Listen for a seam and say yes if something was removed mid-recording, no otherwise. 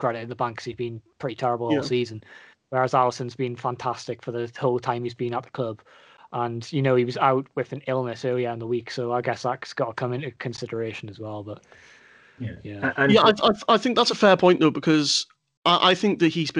no